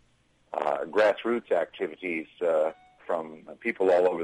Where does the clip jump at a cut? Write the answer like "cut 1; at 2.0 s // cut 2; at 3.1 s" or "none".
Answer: cut 1; at 3.0 s